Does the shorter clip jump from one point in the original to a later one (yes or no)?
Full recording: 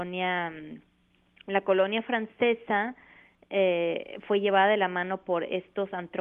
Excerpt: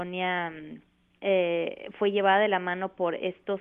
yes